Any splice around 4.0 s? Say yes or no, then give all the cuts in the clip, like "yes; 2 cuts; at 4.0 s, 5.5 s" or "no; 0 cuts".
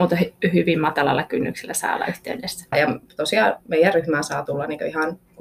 no; 1 cut; at 2.7 s